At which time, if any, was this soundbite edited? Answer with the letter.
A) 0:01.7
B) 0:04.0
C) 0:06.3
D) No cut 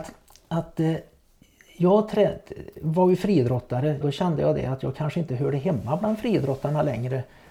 B